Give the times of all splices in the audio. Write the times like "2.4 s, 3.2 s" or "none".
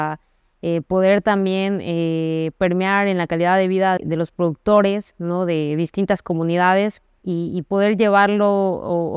4.0 s, 7.2 s